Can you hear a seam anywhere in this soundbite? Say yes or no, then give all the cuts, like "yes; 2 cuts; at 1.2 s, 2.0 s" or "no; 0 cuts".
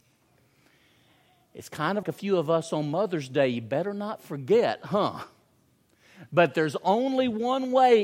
yes; 1 cut; at 2.0 s